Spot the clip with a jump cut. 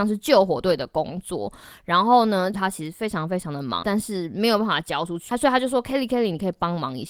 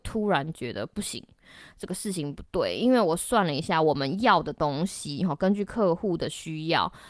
first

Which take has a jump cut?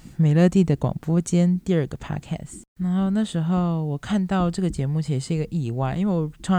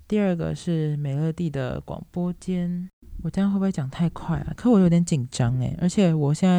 second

